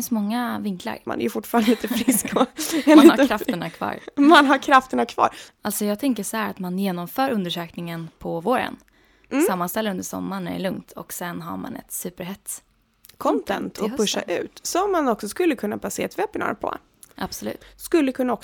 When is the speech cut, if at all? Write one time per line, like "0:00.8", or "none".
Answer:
0:01.1
0:05.5